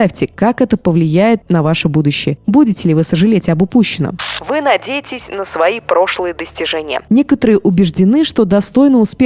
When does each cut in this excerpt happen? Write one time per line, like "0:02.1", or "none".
none